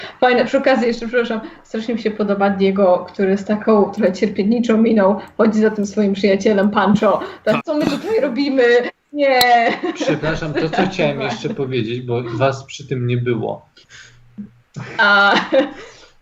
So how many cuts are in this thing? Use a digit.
2